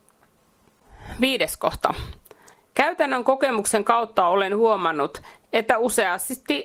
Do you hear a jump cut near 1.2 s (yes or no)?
no